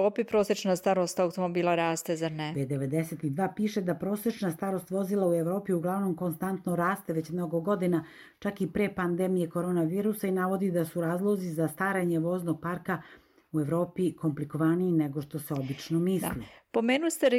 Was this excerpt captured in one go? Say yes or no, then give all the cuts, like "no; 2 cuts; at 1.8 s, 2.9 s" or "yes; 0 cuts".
yes; 0 cuts